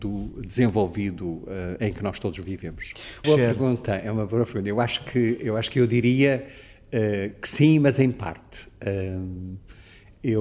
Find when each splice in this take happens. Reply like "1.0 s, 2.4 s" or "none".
3.2 s